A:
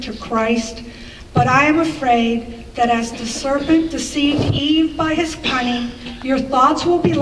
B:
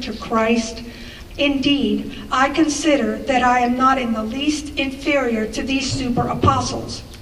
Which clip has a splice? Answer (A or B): B